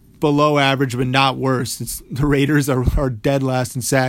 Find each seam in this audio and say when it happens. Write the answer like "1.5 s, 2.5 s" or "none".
none